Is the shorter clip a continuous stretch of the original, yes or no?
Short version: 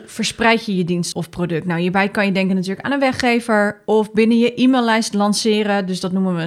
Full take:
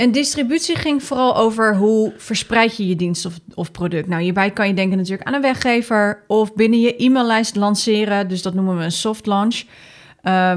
no